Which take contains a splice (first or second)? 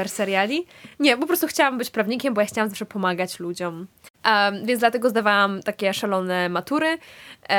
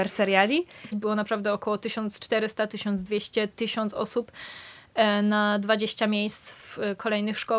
second